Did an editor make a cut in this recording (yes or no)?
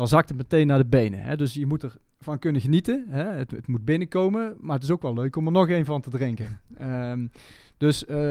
no